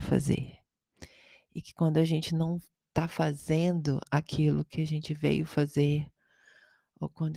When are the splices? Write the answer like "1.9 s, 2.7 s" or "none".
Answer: none